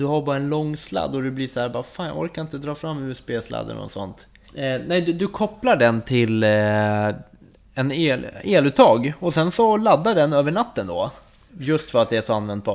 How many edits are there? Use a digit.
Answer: 2